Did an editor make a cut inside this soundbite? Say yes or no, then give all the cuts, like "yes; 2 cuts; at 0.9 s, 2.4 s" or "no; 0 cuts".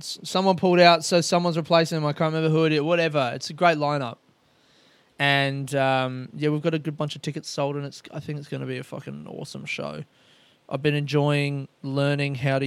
no; 0 cuts